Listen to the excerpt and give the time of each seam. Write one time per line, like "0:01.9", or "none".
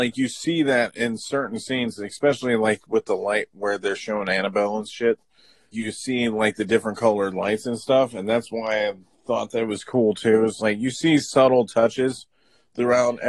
0:05.7